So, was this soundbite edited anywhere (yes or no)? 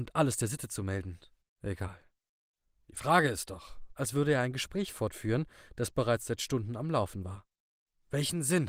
yes